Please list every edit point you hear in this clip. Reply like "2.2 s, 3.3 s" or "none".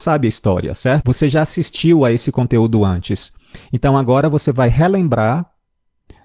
none